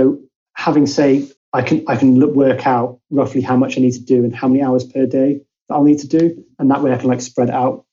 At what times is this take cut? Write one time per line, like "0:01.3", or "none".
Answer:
0:01.4